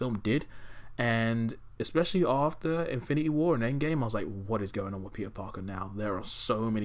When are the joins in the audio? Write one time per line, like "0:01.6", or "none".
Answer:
none